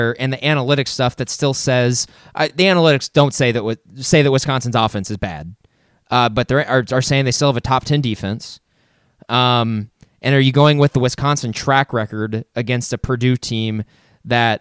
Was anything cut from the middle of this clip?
no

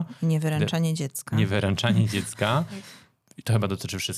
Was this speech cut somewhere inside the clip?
no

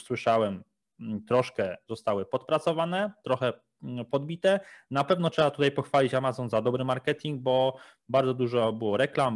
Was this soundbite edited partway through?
no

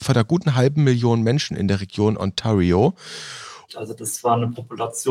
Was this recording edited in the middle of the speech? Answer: yes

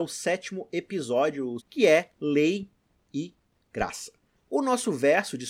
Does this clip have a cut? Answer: yes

